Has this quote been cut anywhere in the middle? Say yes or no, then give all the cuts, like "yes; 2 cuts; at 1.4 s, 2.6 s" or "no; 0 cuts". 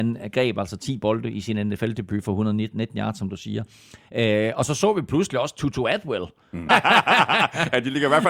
yes; 1 cut; at 6.7 s